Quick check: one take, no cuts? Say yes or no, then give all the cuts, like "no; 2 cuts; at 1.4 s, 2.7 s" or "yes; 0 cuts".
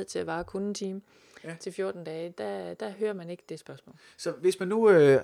yes; 0 cuts